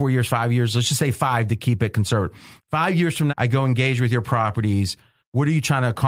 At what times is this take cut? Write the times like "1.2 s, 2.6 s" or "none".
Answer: 3.3 s